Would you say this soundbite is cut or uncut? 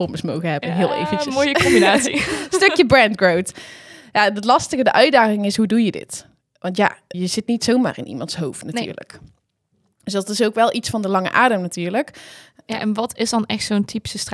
cut